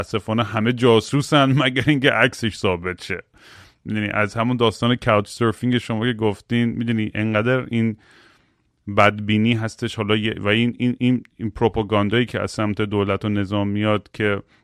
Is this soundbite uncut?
yes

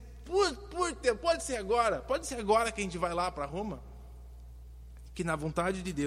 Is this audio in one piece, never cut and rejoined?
yes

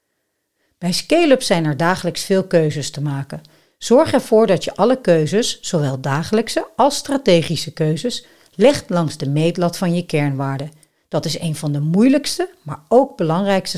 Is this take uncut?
yes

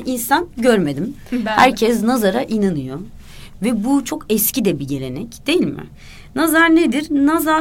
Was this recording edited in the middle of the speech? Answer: no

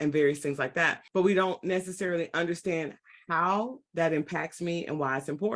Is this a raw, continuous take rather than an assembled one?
no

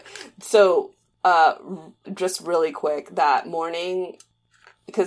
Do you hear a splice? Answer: yes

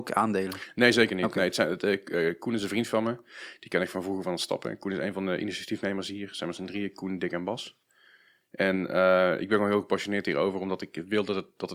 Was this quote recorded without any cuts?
yes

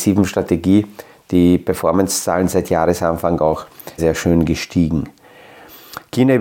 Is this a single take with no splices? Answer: no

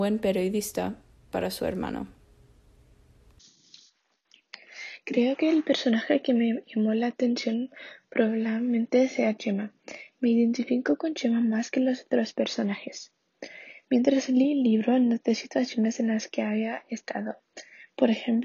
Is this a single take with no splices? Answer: yes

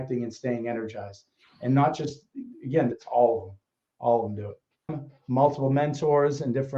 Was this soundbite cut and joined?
yes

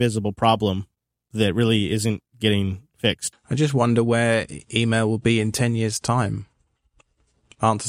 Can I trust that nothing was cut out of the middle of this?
no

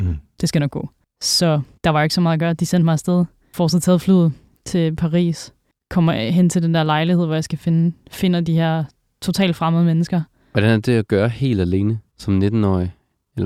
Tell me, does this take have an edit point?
no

